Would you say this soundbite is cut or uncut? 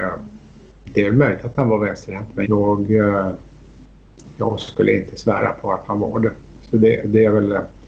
cut